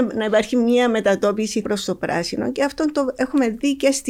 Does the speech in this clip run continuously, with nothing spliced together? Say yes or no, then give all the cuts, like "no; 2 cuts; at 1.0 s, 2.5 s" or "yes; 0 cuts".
no; 1 cut; at 1.6 s